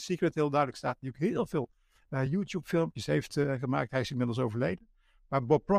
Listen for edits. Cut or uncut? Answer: uncut